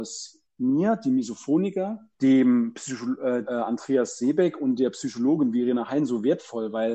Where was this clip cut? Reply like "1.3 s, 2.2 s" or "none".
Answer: 2.1 s, 3.5 s